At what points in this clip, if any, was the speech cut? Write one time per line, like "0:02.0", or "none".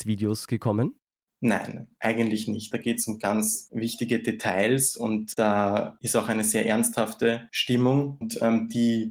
0:02.7